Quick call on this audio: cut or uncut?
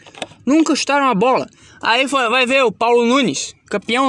uncut